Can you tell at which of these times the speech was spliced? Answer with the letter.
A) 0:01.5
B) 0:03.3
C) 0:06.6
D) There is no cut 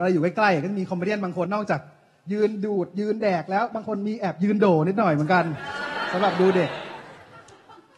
A